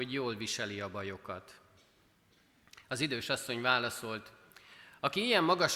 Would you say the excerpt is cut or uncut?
uncut